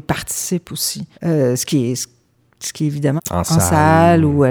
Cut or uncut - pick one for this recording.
cut